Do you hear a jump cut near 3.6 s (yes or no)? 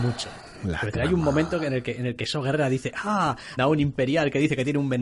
yes